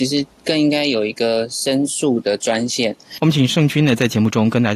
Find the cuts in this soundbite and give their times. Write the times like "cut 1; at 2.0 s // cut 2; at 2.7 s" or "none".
cut 1; at 3.2 s